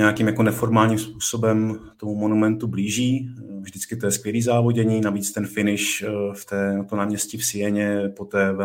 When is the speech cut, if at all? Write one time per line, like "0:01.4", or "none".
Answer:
0:03.6